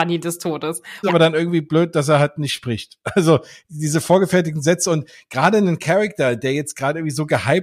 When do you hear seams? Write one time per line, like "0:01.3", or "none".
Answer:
0:01.0